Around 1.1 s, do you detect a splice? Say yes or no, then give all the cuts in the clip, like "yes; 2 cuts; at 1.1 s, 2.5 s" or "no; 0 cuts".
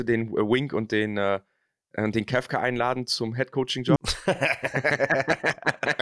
no; 1 cut; at 4.0 s